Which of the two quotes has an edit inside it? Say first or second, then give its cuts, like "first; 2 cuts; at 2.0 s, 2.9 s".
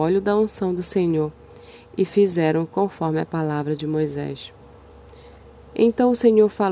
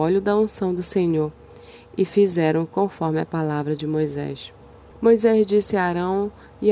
second; 1 cut; at 4.9 s